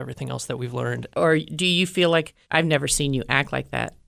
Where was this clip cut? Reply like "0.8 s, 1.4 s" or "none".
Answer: 1.1 s, 2.4 s